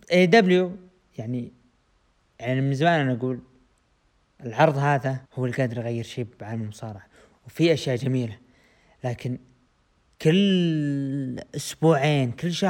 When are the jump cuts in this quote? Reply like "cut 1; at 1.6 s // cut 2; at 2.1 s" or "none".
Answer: cut 1; at 5.3 s